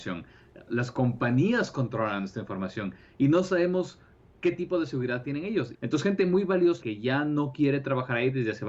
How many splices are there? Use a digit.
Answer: 2